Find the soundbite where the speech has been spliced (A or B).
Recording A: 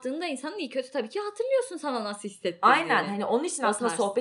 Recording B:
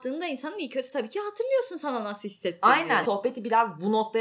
B